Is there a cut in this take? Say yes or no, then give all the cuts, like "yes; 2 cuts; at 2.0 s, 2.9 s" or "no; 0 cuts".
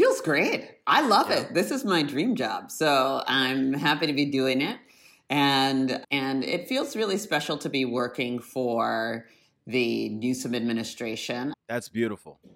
yes; 2 cuts; at 6.0 s, 11.5 s